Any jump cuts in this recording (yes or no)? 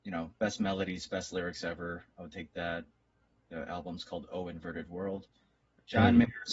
no